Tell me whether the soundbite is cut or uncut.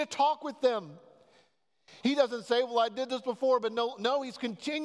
cut